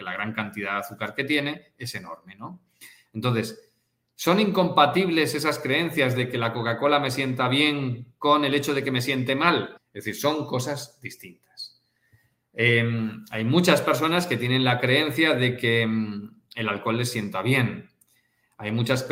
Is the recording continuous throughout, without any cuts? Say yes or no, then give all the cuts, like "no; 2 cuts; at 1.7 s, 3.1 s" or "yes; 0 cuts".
no; 1 cut; at 9.8 s